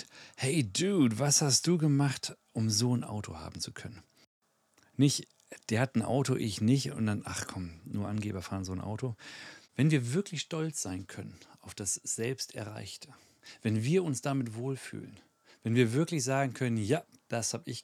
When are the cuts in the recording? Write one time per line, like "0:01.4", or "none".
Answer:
0:09.6